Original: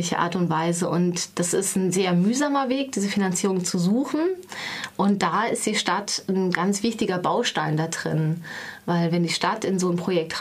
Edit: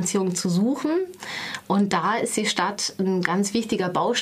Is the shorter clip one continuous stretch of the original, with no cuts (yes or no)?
yes